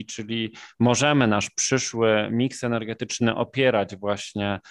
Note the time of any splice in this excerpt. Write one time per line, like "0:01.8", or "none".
none